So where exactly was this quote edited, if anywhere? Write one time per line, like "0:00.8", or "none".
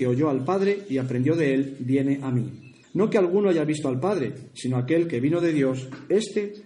0:02.8

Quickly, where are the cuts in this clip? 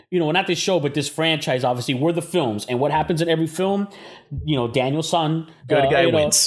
none

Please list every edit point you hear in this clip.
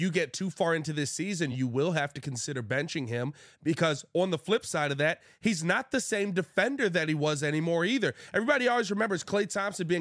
none

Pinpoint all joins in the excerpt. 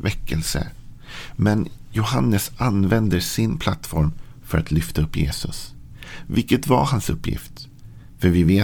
none

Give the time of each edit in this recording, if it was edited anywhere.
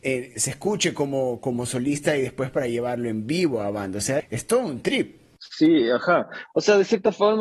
0:04.2

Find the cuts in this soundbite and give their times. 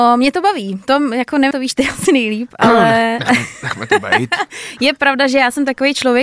0:01.5

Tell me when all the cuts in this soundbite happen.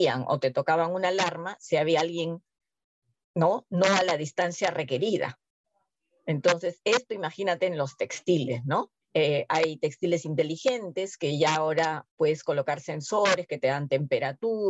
0:09.0
0:12.1

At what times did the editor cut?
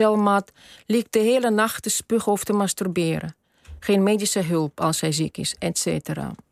0:05.6

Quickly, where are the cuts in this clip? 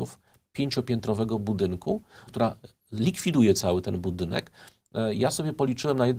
0:02.3

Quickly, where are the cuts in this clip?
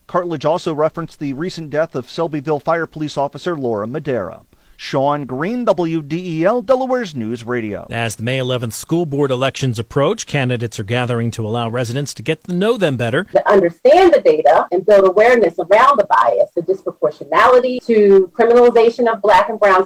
0:13.3

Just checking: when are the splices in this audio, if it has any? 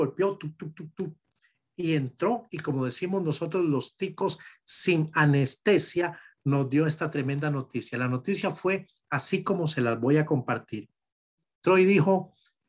none

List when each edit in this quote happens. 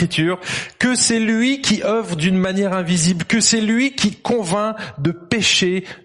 none

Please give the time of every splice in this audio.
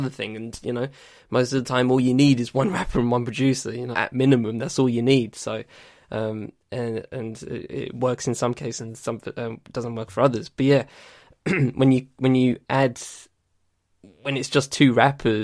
0:03.9

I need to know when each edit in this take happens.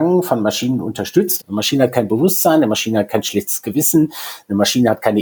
0:01.4

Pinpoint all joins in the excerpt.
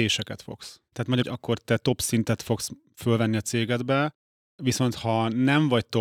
0:01.2

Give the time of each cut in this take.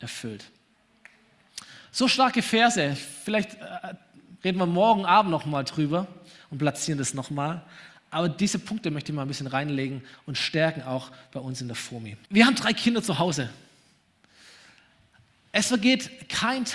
0:12.3

